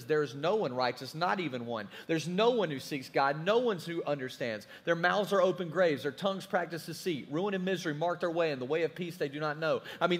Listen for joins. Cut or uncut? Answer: uncut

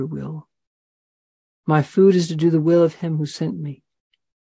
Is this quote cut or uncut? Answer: cut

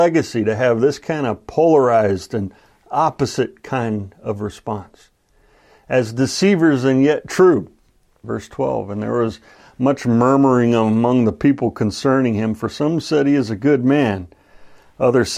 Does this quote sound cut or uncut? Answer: cut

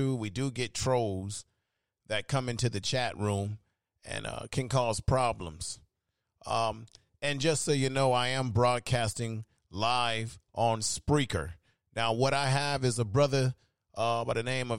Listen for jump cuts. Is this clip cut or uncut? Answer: uncut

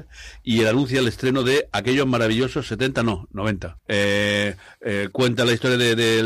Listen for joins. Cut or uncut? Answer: cut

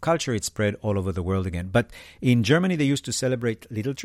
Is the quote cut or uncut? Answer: uncut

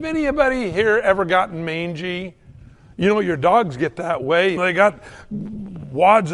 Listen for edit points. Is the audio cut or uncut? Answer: cut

